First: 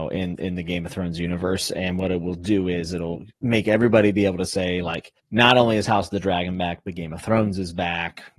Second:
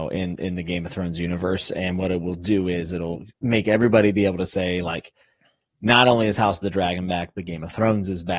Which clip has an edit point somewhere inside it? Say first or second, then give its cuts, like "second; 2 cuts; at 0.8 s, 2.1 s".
first; 1 cut; at 5.2 s